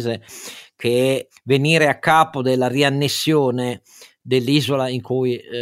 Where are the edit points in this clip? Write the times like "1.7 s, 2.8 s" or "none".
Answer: none